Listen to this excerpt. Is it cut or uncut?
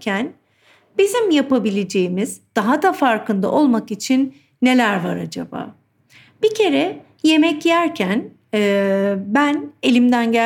uncut